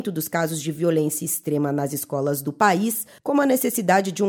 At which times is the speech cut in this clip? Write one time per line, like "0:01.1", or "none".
0:03.2